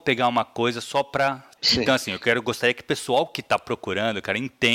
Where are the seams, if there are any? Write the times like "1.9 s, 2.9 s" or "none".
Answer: 1.6 s

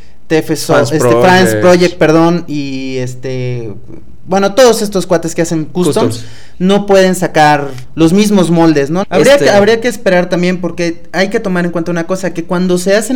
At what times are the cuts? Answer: 9.0 s

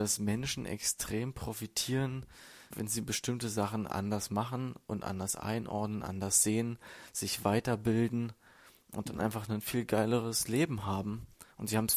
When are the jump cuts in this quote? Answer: 2.7 s

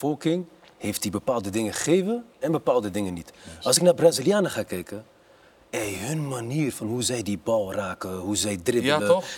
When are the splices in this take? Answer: none

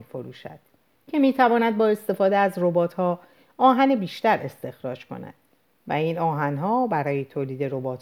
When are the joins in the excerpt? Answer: 1.0 s

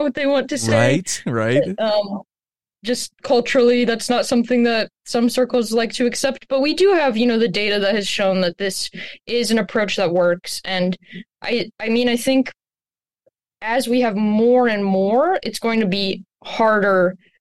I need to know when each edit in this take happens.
none

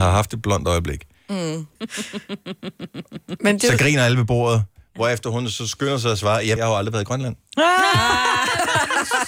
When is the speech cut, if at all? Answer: 1.8 s, 6.6 s

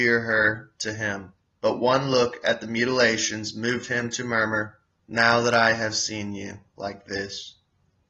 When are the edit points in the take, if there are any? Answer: 5.0 s

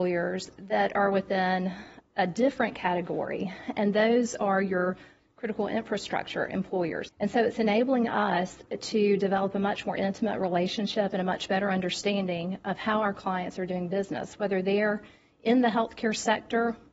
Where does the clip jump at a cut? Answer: 7.1 s

